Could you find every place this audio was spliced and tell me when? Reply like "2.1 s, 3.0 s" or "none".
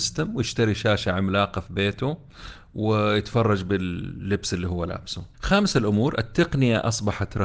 5.3 s

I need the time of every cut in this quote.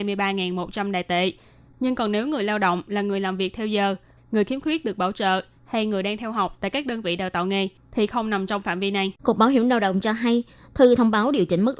1.7 s, 4.2 s, 9.2 s

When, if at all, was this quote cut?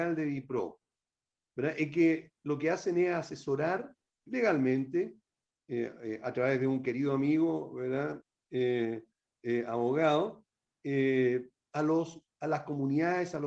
4.3 s

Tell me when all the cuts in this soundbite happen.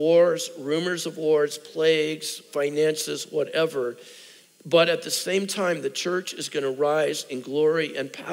none

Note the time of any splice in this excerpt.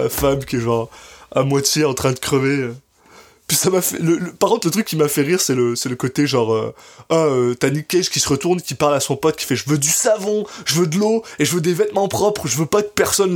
none

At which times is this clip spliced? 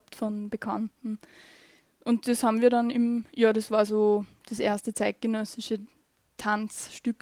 none

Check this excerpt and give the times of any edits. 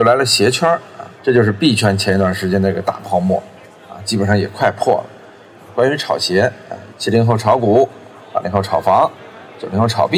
1.2 s, 5.6 s, 6.9 s

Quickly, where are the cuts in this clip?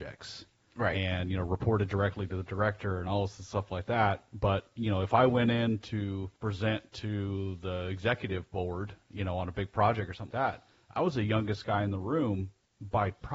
6.4 s, 10.3 s

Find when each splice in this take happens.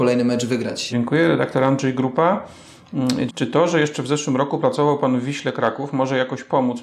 0.9 s, 3.3 s

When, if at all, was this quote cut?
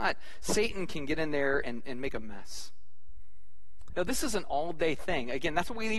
3.9 s

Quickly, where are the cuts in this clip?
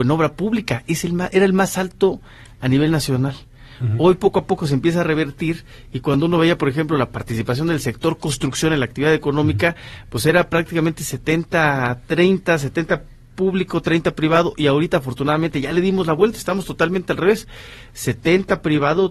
none

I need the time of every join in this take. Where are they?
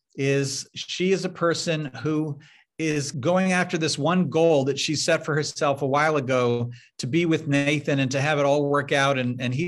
3.1 s

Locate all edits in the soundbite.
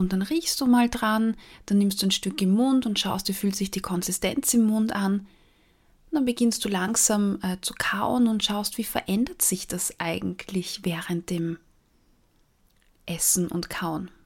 none

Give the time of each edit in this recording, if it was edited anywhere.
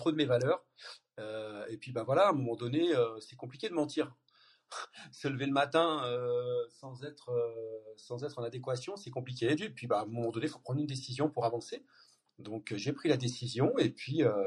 9.6 s

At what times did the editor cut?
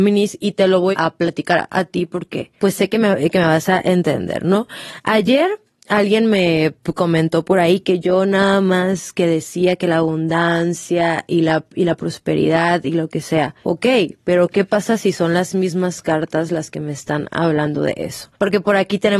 0.9 s

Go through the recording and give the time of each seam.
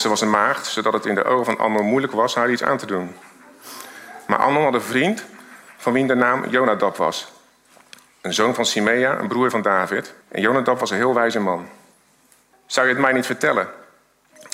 10.2 s, 12.5 s

